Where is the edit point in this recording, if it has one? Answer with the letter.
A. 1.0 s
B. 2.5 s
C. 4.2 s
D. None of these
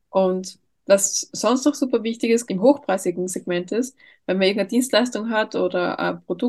B